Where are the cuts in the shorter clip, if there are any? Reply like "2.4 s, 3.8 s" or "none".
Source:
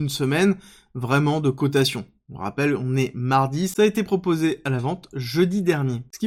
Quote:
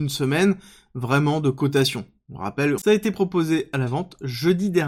2.8 s